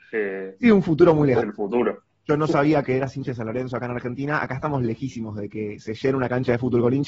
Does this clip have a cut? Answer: yes; 2 cuts; at 1.4 s, 2.8 s

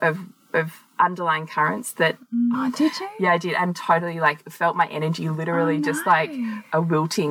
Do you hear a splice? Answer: yes; 1 cut; at 2.5 s

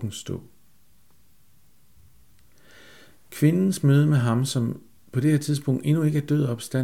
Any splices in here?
no; 0 cuts

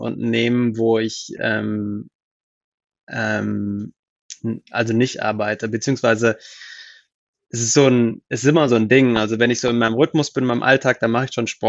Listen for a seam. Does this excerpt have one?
no; 0 cuts

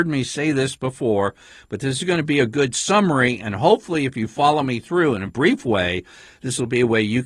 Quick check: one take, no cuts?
no; 1 cut; at 5.3 s

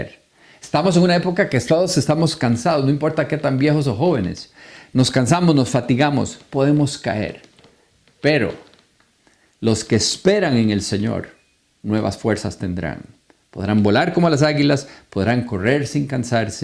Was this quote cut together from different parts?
no; 0 cuts

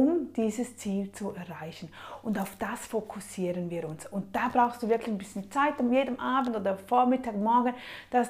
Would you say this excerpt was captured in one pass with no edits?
yes; 0 cuts

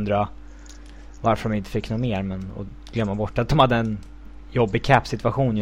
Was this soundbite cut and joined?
no; 0 cuts

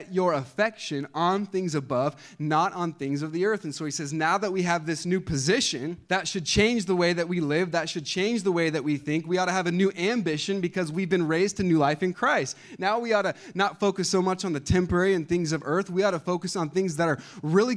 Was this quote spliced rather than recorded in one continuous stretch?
yes; 1 cut; at 6.0 s

